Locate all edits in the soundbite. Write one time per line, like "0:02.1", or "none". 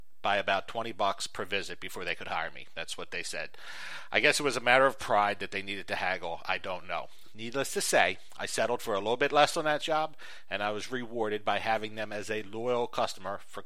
none